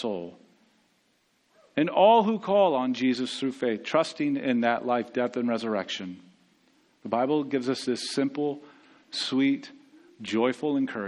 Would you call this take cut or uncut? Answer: uncut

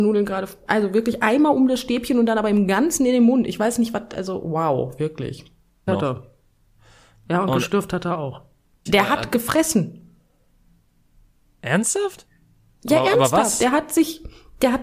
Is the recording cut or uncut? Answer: cut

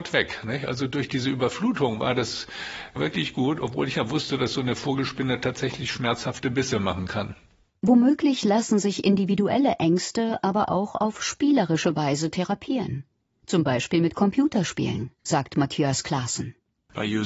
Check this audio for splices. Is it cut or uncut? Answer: uncut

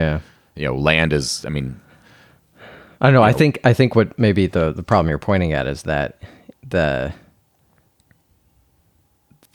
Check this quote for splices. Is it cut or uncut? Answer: uncut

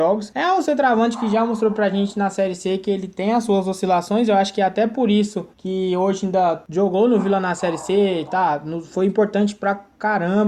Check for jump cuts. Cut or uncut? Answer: uncut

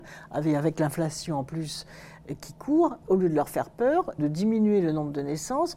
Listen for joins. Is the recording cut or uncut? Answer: cut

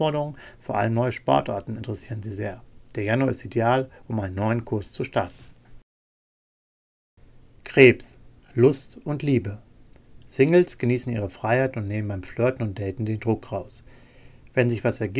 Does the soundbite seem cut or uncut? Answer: uncut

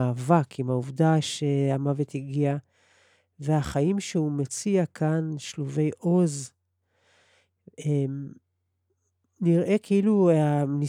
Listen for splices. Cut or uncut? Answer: uncut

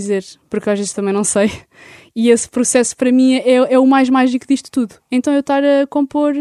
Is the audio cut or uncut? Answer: uncut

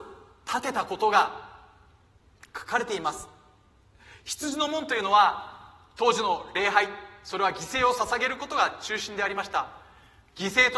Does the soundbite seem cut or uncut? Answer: uncut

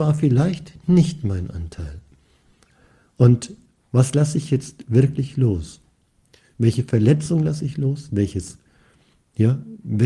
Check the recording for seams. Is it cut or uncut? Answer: uncut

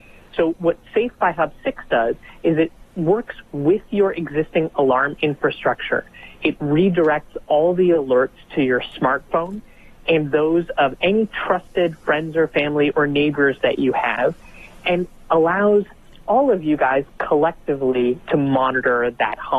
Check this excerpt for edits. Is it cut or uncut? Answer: uncut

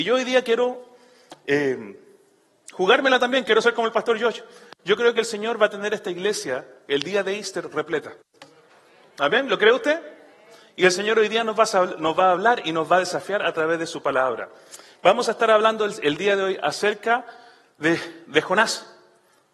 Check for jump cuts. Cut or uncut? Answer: uncut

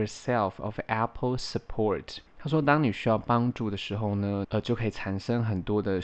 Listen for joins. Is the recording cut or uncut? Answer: cut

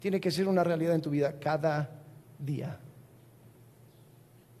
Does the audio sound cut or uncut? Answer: uncut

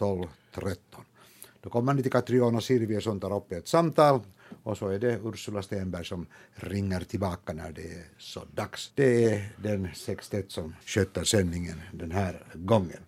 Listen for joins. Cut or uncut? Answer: cut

